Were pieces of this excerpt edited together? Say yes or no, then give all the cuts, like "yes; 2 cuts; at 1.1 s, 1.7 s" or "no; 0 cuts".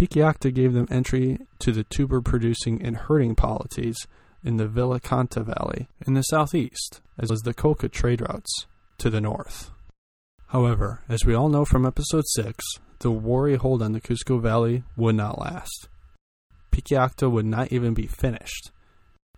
yes; 1 cut; at 7.3 s